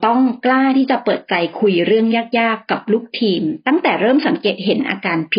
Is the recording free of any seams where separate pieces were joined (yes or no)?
yes